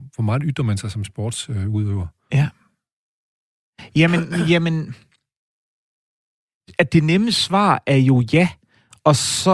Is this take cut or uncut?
uncut